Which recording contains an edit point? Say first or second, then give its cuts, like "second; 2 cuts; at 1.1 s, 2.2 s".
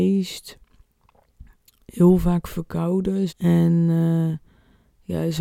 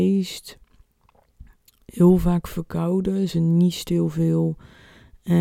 first; 1 cut; at 3.3 s